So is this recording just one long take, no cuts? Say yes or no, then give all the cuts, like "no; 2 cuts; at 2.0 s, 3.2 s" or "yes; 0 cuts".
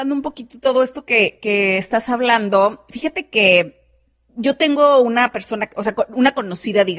yes; 0 cuts